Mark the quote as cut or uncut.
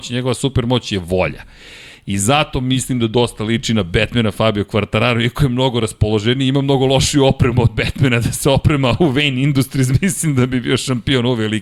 uncut